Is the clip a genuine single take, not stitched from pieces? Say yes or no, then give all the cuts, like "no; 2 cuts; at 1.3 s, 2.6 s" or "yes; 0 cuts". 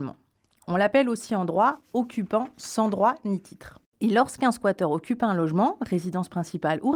no; 1 cut; at 3.9 s